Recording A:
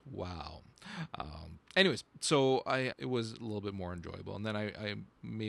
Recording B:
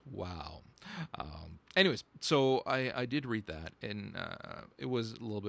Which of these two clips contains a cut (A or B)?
A